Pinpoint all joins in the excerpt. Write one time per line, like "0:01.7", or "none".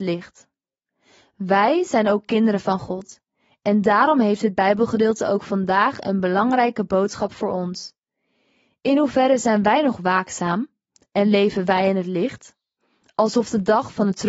none